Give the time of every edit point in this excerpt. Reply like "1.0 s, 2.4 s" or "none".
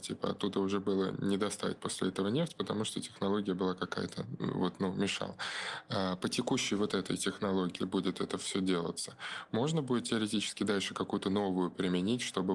7.8 s